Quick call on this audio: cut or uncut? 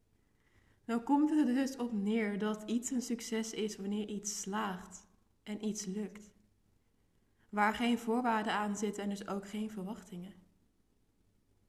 uncut